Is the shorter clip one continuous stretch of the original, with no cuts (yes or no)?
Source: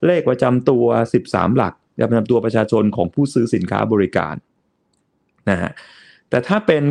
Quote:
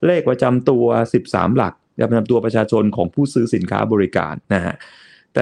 no